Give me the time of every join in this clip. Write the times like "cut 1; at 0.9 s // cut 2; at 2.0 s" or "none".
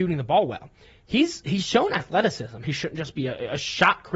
cut 1; at 2.6 s